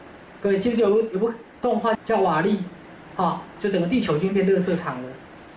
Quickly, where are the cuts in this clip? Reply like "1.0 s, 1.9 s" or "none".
1.9 s, 3.6 s